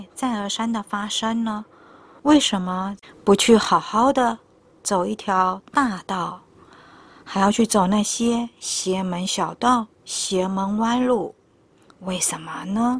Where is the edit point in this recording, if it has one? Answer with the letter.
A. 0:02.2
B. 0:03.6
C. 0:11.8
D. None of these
A